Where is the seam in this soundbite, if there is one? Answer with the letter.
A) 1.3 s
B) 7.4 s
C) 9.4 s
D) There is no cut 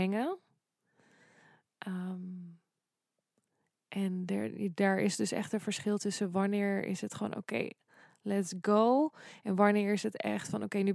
D